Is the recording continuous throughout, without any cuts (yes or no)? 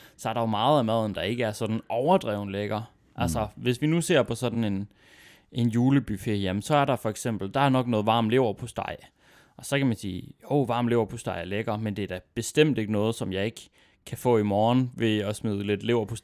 yes